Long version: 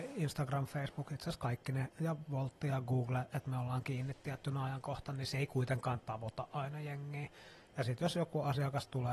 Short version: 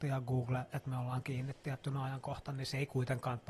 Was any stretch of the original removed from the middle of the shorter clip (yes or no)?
no